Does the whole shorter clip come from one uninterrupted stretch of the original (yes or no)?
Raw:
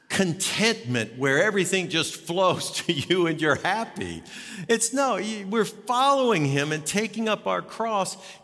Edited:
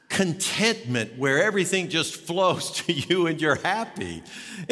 yes